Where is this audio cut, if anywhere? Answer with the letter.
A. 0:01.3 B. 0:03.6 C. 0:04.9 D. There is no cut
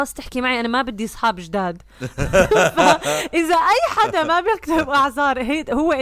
D